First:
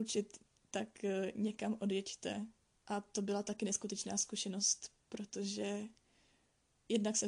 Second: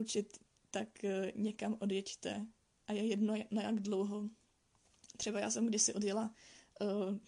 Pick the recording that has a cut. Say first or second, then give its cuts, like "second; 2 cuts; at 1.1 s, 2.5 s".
first; 2 cuts; at 2.7 s, 5.0 s